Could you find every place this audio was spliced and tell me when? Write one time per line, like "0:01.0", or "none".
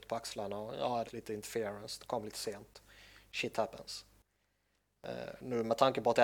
0:01.1

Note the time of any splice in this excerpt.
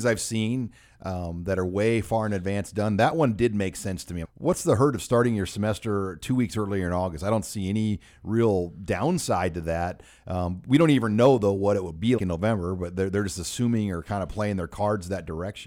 0:04.2
0:12.2

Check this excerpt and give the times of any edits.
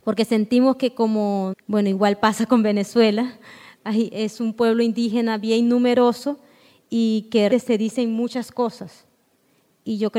0:01.5
0:07.5

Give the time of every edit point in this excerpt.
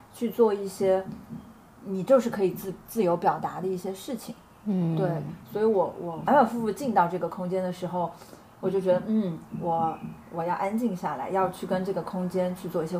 0:06.3

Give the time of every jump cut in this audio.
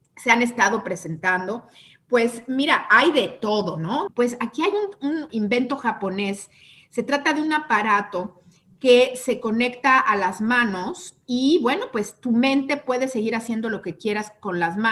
0:04.1
0:05.3

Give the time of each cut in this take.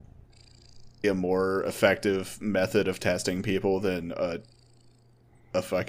0:01.0

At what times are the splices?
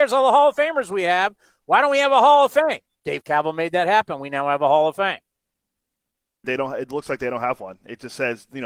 0:06.4

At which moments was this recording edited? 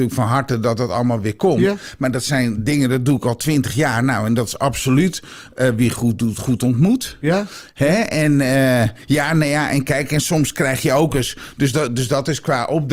none

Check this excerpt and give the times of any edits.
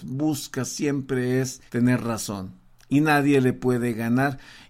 0:01.7

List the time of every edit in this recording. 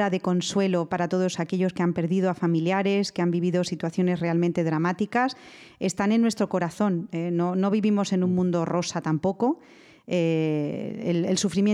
none

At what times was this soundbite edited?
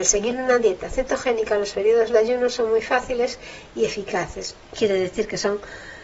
0:04.6

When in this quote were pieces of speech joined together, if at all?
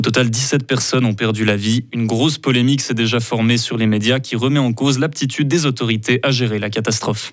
0:01.9

